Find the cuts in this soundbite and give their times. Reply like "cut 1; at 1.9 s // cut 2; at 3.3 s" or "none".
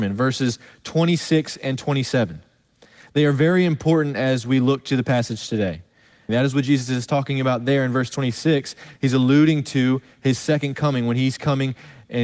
cut 1; at 6.3 s